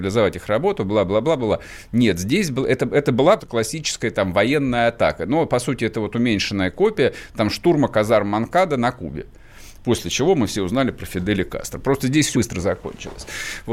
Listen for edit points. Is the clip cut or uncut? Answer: cut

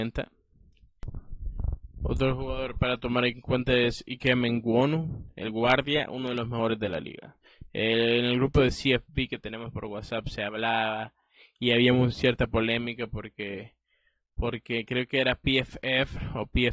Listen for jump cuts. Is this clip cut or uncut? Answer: uncut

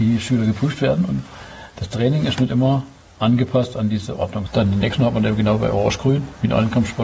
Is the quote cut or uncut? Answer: cut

